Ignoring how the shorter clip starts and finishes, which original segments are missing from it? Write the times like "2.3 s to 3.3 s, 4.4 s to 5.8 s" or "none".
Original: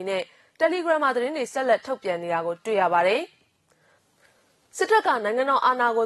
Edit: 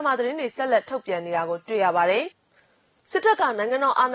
3.3 s to 4.0 s